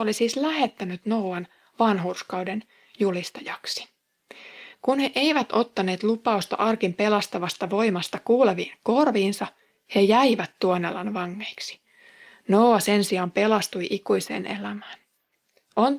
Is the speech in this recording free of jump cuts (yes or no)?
yes